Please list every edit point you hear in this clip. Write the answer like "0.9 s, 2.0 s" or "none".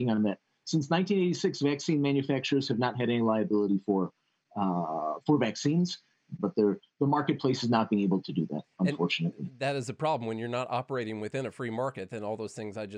6.4 s, 8.2 s